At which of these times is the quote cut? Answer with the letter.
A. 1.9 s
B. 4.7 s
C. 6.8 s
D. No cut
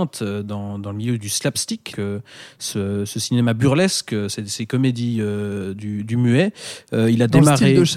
A